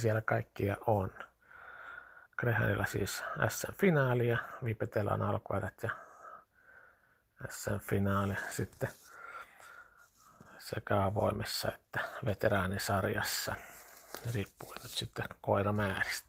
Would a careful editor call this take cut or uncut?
cut